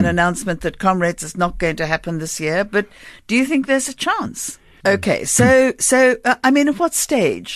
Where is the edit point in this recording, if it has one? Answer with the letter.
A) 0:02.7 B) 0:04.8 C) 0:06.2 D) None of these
B